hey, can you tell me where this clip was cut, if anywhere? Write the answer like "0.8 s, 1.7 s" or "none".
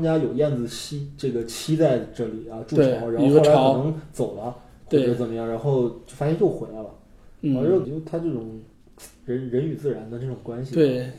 7.8 s